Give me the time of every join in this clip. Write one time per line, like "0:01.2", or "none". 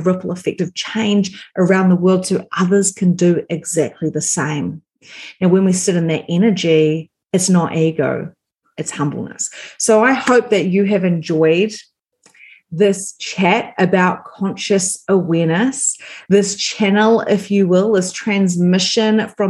none